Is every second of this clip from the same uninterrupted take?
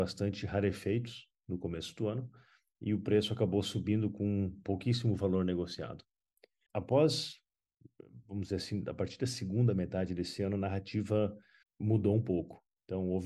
yes; 0 cuts

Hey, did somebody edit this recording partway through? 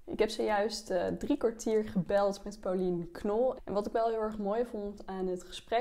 yes; 1 cut; at 3.6 s

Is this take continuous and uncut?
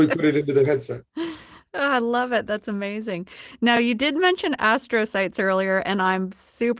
yes; 0 cuts

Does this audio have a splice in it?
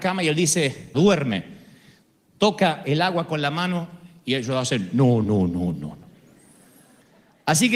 yes; 2 cuts; at 0.9 s, 5.2 s

